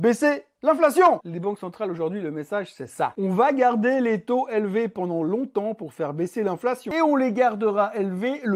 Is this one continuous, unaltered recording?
no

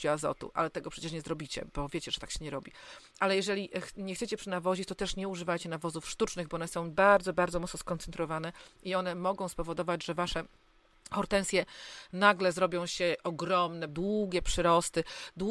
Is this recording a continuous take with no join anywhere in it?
no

